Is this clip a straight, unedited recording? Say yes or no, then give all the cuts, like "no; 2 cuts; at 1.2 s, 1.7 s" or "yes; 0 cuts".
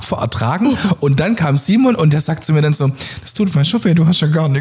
yes; 0 cuts